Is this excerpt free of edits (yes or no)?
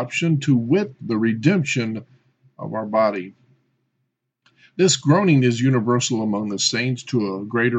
yes